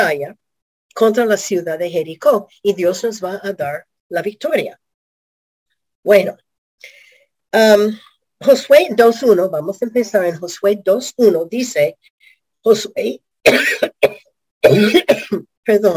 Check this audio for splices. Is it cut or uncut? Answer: cut